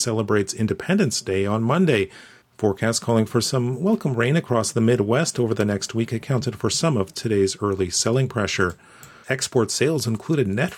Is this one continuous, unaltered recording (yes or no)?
no